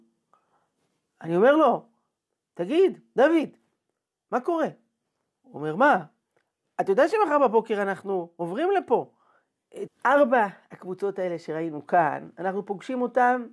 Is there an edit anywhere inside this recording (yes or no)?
yes